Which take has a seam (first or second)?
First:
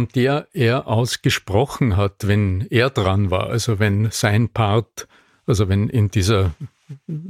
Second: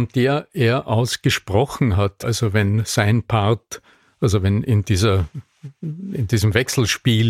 second